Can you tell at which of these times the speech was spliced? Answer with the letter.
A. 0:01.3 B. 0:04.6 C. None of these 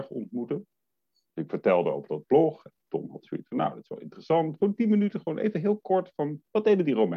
B